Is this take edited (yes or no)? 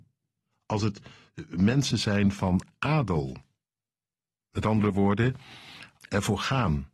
yes